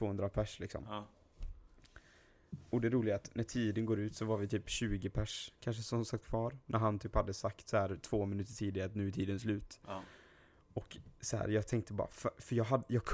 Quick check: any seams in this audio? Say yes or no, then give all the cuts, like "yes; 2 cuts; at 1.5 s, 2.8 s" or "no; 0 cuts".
no; 0 cuts